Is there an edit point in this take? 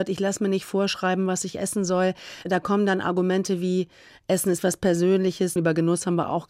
yes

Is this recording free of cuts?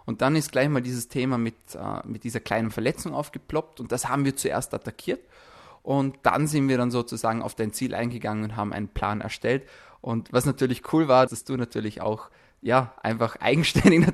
no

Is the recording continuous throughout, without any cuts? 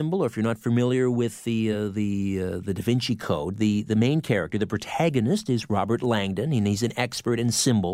yes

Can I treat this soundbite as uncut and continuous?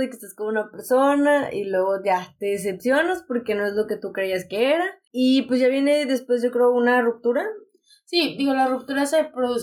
yes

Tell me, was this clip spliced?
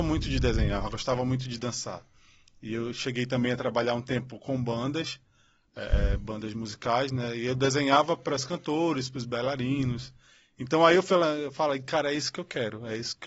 no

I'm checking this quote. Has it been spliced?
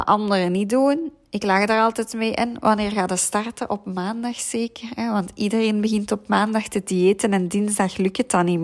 no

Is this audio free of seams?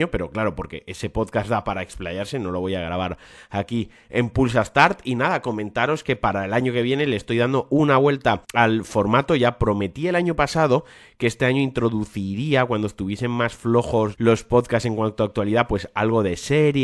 no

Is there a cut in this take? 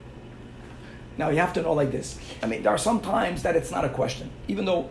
yes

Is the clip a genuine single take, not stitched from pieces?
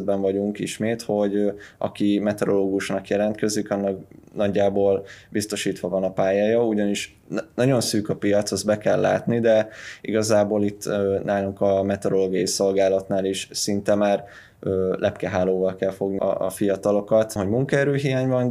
no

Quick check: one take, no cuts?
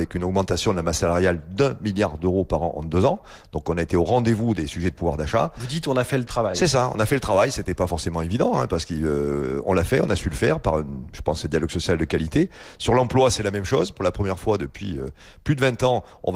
yes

